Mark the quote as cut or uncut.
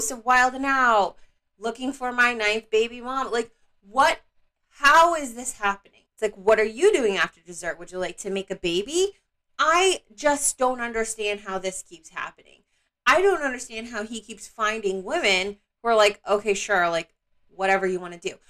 cut